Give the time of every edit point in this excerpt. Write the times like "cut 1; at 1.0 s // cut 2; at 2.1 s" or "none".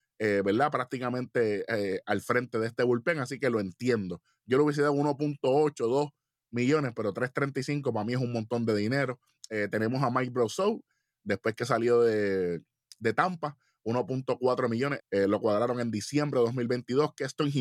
cut 1; at 15.0 s